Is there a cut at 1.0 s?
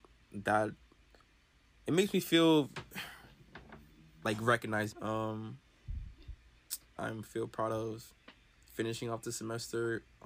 no; 2 cuts; at 4.9 s, 7.0 s

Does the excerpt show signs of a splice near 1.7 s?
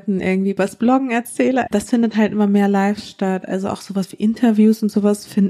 yes; 1 cut; at 1.7 s

